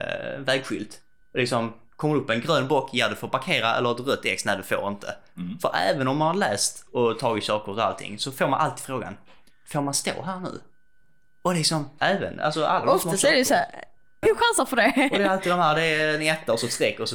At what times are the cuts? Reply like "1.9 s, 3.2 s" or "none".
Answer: 12.0 s, 14.2 s